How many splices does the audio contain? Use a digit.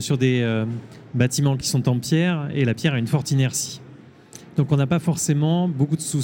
0